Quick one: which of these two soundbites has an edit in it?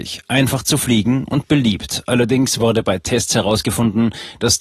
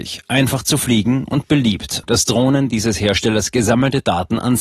second; 1 cut; at 2.0 s

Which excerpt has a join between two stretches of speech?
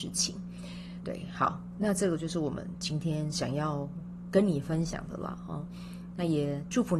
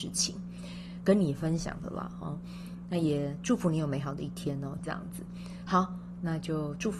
second; 2 cuts; at 1.0 s, 4.8 s

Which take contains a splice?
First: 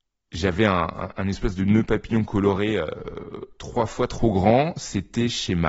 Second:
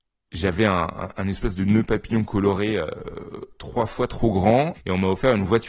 second; 1 cut; at 4.7 s

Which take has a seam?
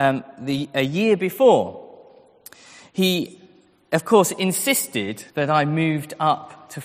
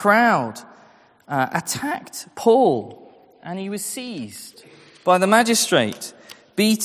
first; 1 cut; at 5.3 s

